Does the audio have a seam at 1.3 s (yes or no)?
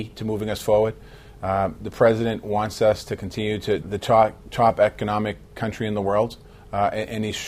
no